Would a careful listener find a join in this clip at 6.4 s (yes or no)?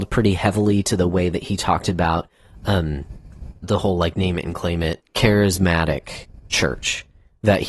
no